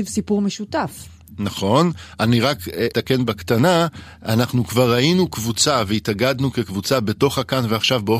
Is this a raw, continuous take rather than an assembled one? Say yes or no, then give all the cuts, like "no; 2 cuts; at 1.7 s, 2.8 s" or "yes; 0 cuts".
yes; 0 cuts